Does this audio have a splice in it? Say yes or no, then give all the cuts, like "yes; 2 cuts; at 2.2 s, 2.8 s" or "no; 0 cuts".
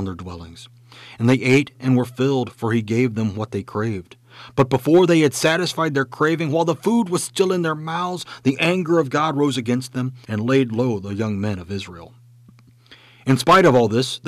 yes; 1 cut; at 10.2 s